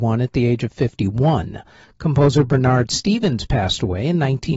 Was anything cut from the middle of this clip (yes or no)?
no